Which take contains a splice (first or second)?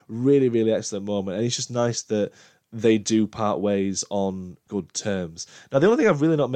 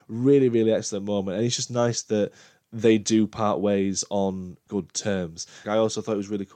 second